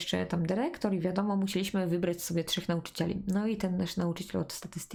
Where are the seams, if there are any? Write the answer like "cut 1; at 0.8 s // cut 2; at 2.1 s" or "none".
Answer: none